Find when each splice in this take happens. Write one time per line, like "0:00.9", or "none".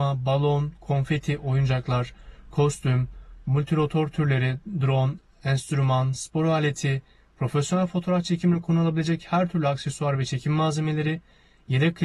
none